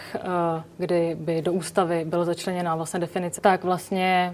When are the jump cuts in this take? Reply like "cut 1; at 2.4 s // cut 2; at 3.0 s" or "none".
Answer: cut 1; at 3.4 s